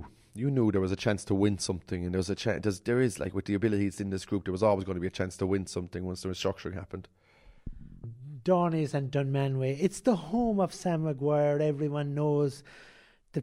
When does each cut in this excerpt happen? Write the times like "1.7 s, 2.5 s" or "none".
none